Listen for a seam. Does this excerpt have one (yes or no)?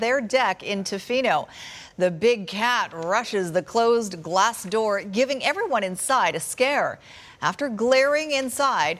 no